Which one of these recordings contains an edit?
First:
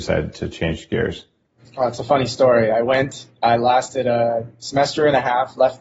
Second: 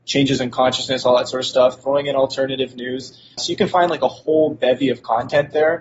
second; 1 cut; at 3.4 s

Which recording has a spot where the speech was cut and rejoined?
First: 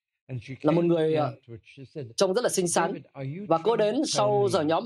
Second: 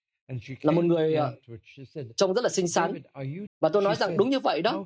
second; 1 cut; at 3.5 s

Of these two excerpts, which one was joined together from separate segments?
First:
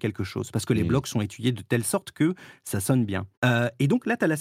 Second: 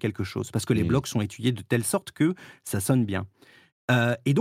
first; 1 cut; at 3.3 s

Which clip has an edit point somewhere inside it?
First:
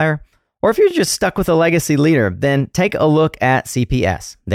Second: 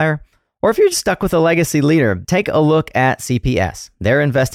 second; 2 cuts; at 0.9 s, 2.2 s

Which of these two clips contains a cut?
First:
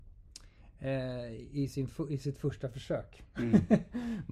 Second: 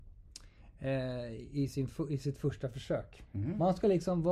second; 1 cut; at 3.3 s

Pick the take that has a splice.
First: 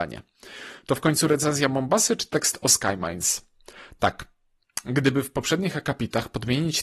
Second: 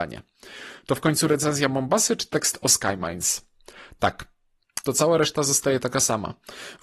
second; 1 cut; at 4.8 s

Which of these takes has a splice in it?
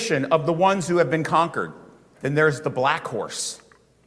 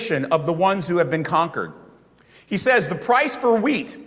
first; 1 cut; at 2.1 s

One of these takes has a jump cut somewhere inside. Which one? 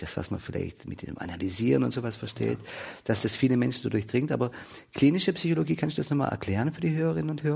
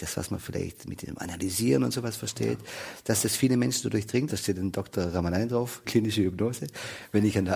second; 2 cuts; at 4.3 s, 5.8 s

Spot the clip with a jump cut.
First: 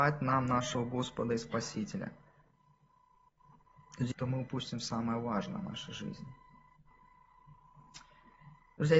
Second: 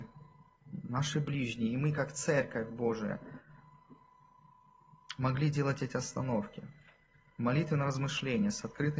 first; 1 cut; at 4.1 s

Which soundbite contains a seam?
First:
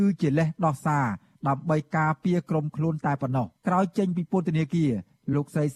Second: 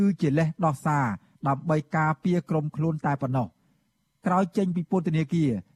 first; 1 cut; at 3.6 s

